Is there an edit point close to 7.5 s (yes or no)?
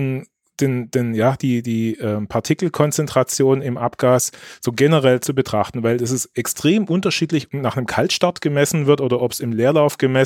yes